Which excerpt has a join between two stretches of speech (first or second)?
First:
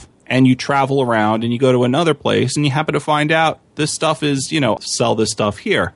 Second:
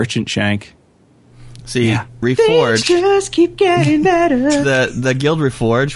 first